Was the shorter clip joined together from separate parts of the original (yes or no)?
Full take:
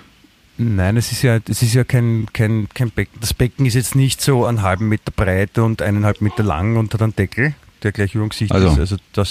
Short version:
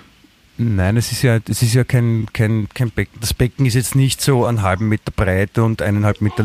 no